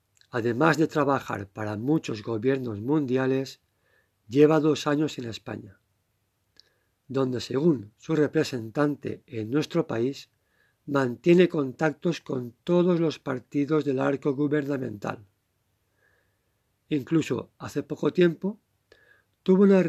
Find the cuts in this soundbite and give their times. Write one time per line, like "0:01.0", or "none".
none